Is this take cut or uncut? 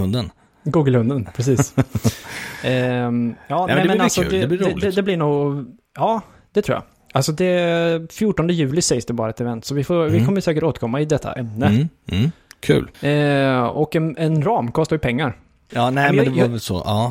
cut